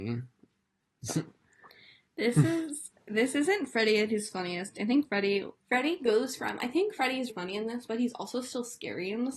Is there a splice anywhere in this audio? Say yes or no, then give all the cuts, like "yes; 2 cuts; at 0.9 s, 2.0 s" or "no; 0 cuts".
yes; 2 cuts; at 5.6 s, 7.3 s